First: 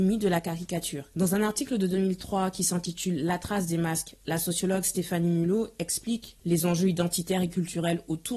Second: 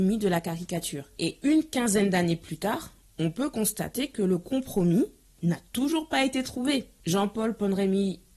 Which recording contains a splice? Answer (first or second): first